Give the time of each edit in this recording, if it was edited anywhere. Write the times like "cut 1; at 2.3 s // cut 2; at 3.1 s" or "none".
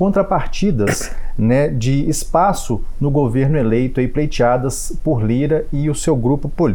none